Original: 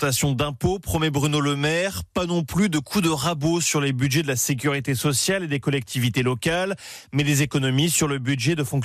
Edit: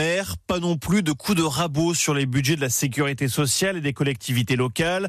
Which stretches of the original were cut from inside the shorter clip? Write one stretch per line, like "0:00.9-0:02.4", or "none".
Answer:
none